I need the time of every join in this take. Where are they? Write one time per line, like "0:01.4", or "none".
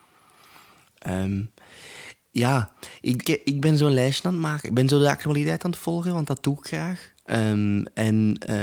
0:03.2